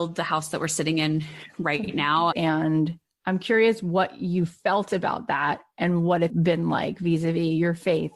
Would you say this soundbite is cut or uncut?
cut